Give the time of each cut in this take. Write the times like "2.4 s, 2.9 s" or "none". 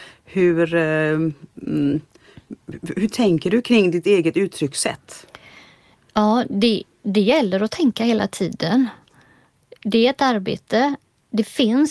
none

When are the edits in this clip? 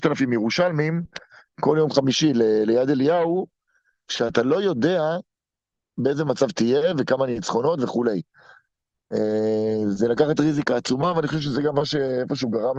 none

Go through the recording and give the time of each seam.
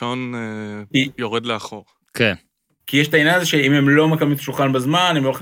2.8 s

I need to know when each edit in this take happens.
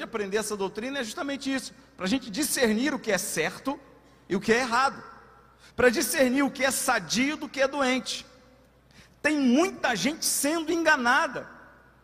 5.7 s

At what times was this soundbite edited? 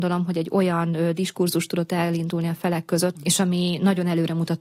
3.1 s

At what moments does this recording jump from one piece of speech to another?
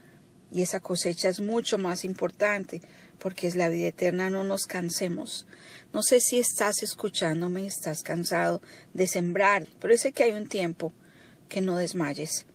9.6 s

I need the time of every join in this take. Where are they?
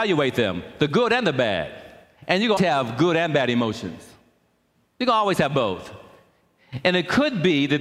2.6 s

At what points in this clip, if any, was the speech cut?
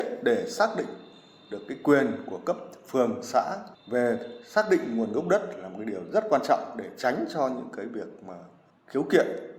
none

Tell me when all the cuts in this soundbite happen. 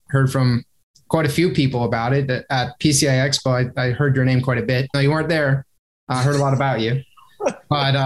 4.9 s

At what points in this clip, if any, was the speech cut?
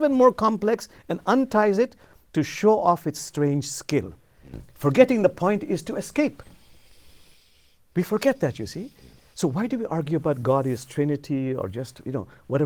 none

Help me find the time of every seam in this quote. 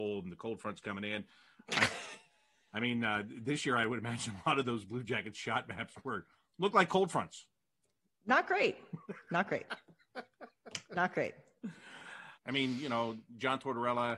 12.4 s

